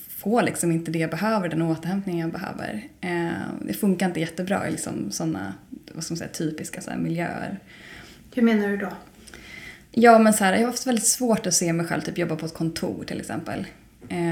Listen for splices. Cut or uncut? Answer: uncut